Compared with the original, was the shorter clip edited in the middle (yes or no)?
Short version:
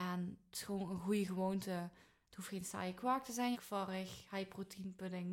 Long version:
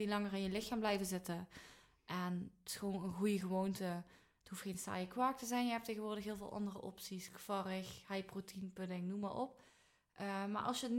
yes